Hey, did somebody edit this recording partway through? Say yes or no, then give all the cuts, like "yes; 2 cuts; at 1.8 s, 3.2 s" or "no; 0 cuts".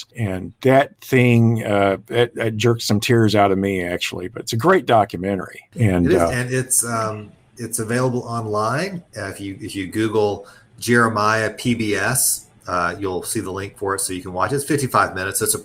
no; 0 cuts